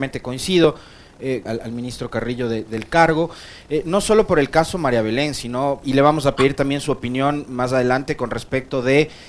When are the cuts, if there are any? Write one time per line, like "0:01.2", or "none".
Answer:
0:01.5
0:05.8